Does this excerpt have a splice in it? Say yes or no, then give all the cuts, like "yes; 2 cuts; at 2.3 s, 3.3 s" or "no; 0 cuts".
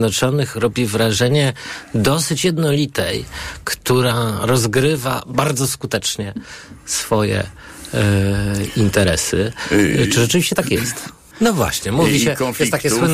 yes; 1 cut; at 11.3 s